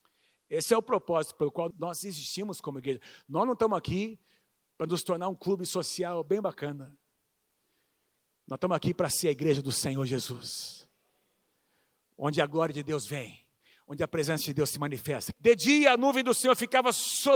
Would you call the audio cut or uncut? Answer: cut